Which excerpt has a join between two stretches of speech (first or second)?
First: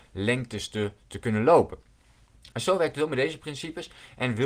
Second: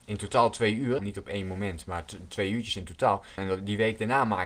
second